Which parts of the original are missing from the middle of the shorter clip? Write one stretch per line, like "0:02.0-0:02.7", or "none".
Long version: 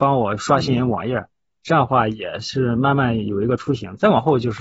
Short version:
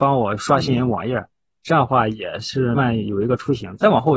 0:02.7-0:02.9